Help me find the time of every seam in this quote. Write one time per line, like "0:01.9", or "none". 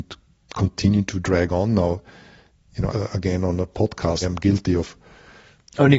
0:02.9
0:04.2